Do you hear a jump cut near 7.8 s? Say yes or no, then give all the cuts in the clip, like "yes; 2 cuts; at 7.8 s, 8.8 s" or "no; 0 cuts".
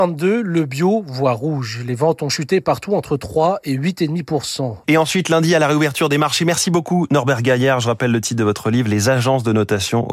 no; 1 cut; at 4.8 s